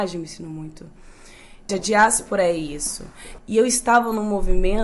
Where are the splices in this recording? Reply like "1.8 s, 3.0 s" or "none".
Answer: 1.7 s, 3.4 s